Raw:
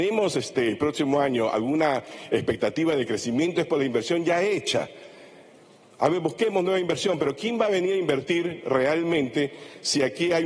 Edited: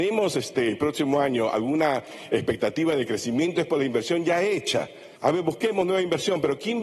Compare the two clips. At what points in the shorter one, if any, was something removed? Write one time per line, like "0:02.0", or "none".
0:05.2